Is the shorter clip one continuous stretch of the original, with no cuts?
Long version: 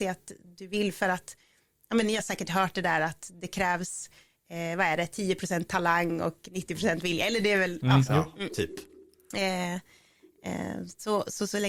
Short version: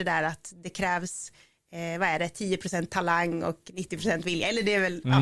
yes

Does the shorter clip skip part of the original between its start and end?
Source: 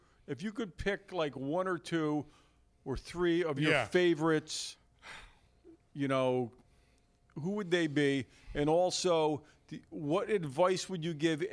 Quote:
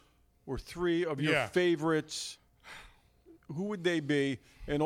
yes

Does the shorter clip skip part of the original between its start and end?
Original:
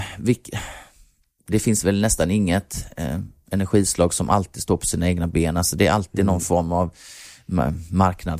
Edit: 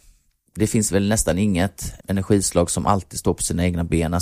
yes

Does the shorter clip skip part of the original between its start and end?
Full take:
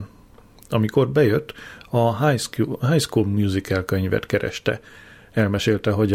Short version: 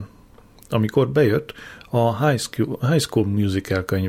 no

